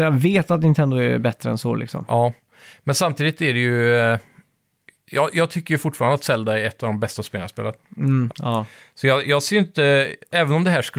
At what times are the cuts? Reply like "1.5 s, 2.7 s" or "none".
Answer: 8.3 s